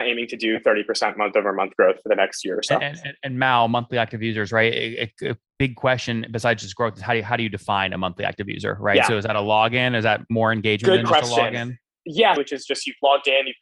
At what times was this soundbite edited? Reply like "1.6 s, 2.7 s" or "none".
12.4 s